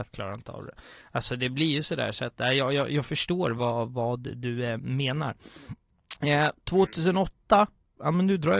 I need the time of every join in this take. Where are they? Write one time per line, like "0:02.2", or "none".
none